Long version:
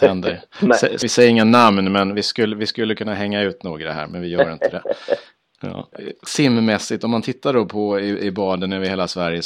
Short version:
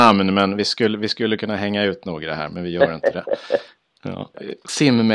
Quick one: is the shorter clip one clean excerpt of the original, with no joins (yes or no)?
yes